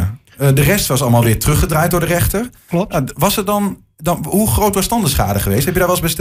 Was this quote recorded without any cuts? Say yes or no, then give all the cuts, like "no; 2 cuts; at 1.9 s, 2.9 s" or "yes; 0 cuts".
yes; 0 cuts